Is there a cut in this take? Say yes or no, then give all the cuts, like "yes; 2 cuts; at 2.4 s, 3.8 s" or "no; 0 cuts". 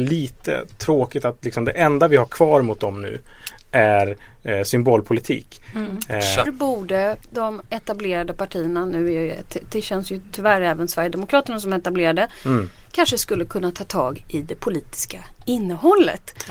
yes; 1 cut; at 6.5 s